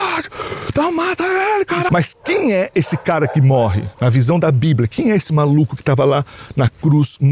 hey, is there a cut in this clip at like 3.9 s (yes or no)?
yes